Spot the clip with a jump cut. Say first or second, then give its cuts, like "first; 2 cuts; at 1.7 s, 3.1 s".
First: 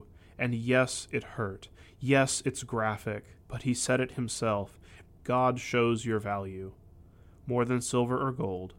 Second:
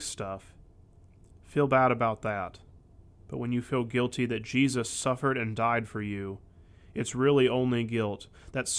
first; 2 cuts; at 3.4 s, 5.1 s